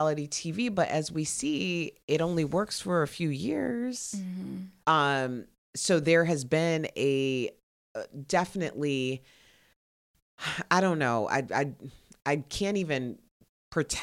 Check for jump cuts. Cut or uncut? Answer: cut